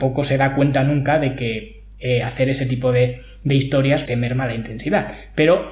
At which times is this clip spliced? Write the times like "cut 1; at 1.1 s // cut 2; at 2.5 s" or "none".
cut 1; at 4.1 s